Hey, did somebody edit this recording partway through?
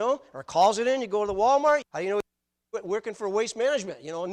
yes; 1 cut; at 1.8 s

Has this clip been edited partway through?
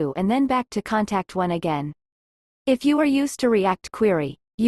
no; 0 cuts

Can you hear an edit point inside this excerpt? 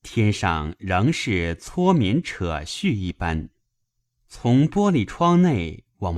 yes; 1 cut; at 4.1 s

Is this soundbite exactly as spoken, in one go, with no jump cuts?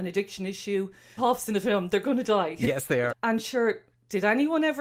no; 2 cuts; at 1.2 s, 3.1 s

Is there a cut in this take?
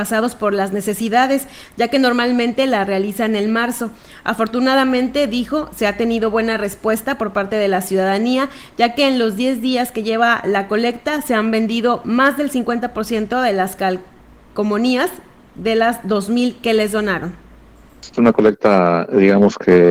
no; 0 cuts

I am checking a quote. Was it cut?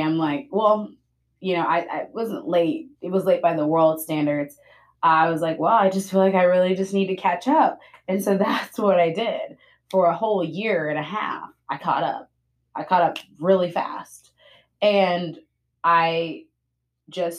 no; 0 cuts

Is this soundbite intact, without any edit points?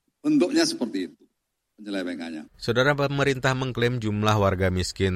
no; 1 cut; at 2.5 s

